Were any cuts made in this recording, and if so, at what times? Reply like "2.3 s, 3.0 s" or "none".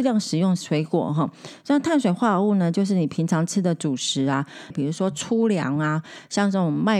4.7 s